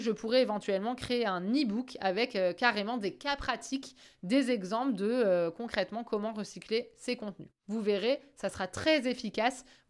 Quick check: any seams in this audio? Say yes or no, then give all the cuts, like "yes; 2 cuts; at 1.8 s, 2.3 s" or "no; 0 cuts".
yes; 1 cut; at 7.6 s